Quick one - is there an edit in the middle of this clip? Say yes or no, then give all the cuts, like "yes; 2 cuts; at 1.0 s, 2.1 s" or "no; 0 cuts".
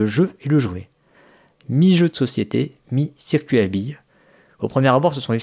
no; 0 cuts